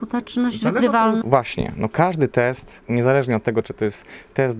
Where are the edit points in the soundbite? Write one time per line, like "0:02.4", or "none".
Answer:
0:01.2
0:03.6

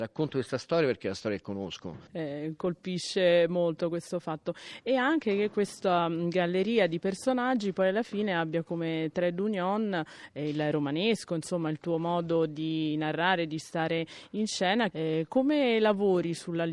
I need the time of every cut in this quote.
0:02.1

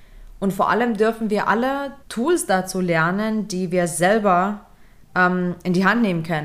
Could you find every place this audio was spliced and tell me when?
0:02.0

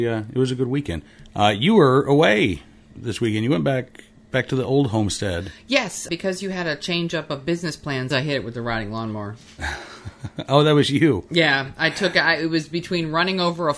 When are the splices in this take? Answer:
0:06.1
0:08.1

